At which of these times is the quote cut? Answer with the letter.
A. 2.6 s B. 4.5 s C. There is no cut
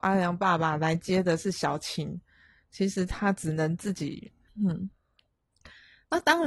B